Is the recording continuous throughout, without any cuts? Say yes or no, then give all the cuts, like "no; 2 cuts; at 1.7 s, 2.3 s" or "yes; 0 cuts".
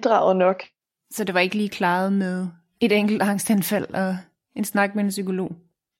yes; 0 cuts